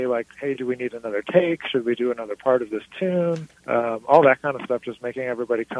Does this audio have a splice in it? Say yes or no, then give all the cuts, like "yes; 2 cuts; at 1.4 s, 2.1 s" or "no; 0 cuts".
yes; 1 cut; at 3.6 s